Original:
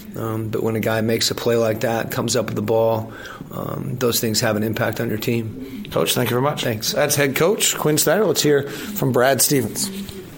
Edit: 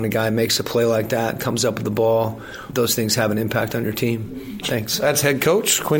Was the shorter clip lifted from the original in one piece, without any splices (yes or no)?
no